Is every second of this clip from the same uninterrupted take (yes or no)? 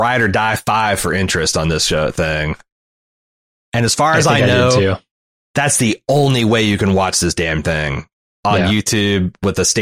no